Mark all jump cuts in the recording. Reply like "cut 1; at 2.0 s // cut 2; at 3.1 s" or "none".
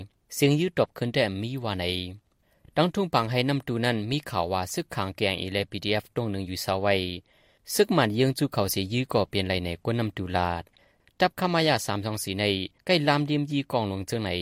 none